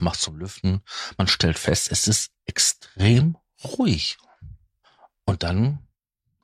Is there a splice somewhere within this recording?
no; 0 cuts

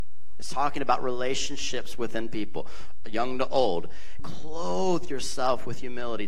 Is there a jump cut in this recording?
yes; 1 cut; at 4.2 s

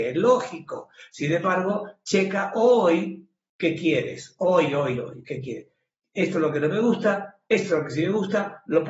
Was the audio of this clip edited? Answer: no; 0 cuts

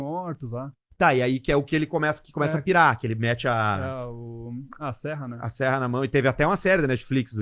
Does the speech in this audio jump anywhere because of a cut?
no; 0 cuts

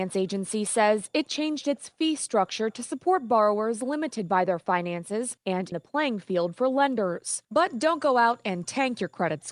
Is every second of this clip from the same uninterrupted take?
no; 2 cuts; at 5.7 s, 7.5 s

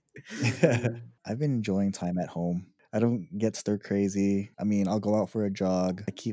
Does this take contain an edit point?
yes; 1 cut; at 4.5 s

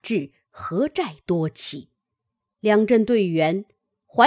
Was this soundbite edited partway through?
no; 0 cuts

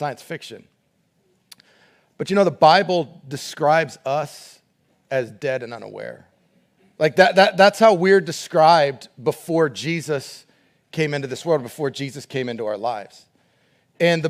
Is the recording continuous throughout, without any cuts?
yes; 0 cuts

